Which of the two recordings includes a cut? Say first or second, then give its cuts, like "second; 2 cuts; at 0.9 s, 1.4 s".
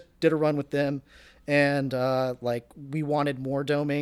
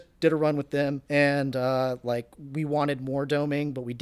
second; 1 cut; at 1.0 s